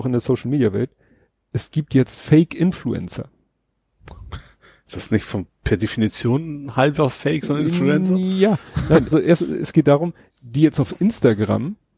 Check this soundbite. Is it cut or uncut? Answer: cut